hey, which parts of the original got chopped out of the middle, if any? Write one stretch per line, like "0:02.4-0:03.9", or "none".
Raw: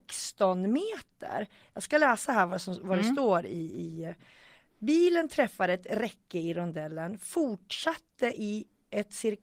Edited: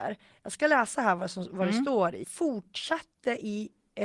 0:03.5-0:07.2

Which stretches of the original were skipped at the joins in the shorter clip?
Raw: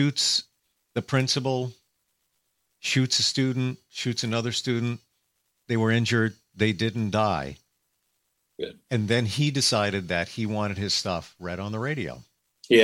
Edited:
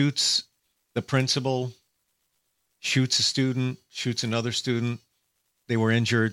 none

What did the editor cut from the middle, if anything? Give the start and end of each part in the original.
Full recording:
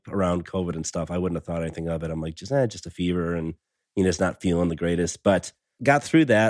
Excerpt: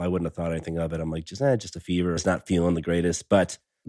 0:03.3-0:04.1

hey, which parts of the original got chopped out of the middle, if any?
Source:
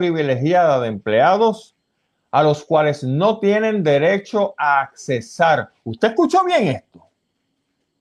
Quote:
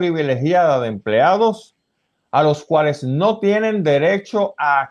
none

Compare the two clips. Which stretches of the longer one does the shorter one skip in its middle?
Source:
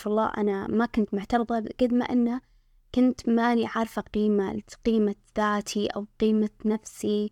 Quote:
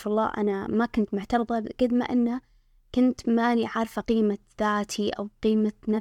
0:04.0-0:04.8

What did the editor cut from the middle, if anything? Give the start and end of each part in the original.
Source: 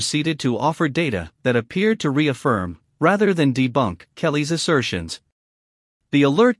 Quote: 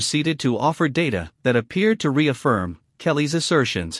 0:02.9-0:04.1

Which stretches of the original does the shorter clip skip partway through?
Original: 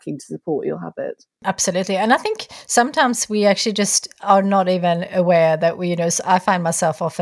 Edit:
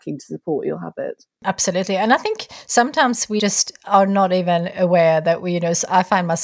0:03.4-0:03.7

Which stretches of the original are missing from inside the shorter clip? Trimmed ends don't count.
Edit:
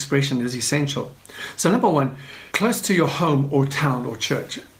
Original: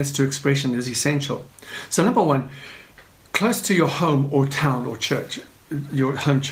0:02.8-0:03.3

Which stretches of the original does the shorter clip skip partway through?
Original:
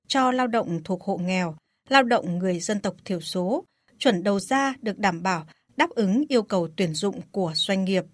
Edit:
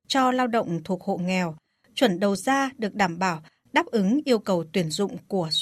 0:01.8-0:03.8

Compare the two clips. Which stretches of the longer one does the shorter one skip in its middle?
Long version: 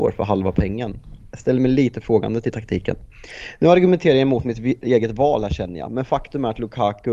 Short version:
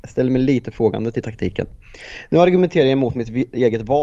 none

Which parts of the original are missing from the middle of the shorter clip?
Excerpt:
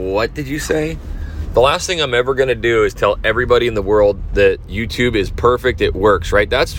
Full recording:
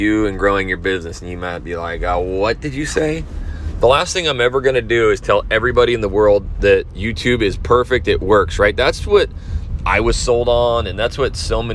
none

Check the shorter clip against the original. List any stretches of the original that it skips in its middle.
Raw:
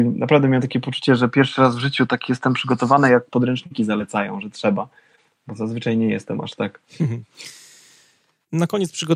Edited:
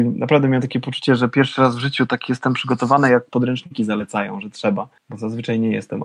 0:05.0-0:05.4

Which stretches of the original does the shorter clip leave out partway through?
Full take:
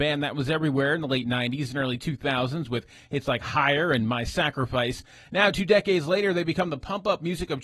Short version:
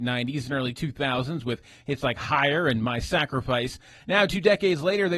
none

